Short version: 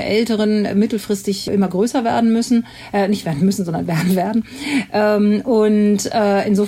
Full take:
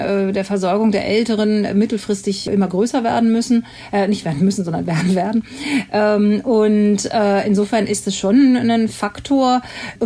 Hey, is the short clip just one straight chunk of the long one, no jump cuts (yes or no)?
yes